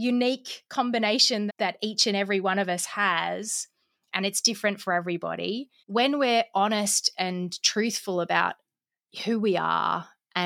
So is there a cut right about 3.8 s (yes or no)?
no